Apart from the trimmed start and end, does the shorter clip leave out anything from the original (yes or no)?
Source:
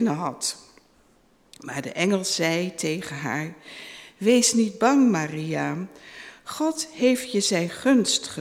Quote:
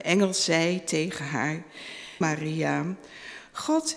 yes